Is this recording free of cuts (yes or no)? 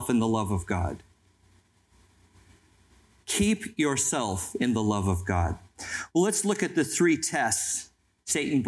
yes